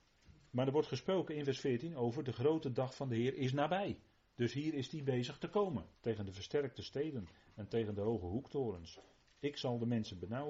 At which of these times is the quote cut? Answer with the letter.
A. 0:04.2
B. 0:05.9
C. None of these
B